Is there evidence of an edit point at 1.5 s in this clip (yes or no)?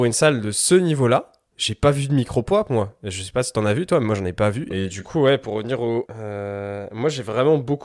no